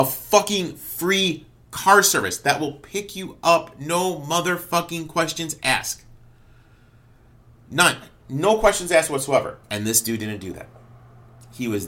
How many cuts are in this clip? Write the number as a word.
one